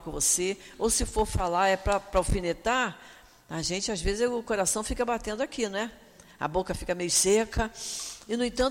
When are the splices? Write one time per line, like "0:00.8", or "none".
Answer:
none